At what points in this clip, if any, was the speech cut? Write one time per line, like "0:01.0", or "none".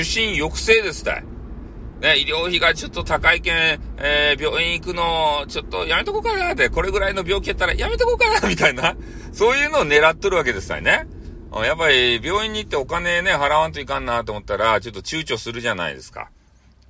none